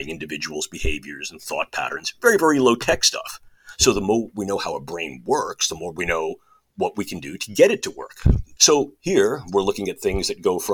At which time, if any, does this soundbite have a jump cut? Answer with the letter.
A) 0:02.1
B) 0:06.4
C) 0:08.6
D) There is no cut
C